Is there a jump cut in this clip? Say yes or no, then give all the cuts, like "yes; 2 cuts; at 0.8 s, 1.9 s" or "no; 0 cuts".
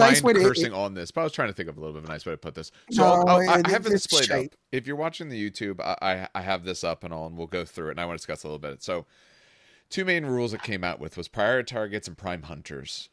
no; 0 cuts